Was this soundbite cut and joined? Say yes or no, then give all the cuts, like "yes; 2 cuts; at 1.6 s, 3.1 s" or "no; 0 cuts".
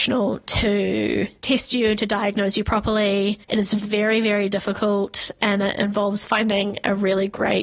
no; 0 cuts